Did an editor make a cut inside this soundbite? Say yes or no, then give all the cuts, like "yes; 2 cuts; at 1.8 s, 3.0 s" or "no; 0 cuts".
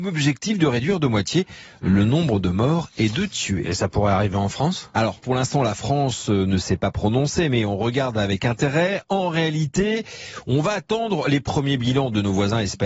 no; 0 cuts